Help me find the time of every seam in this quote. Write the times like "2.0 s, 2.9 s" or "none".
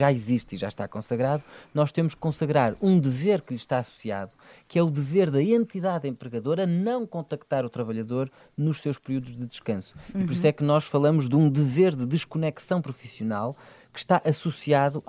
none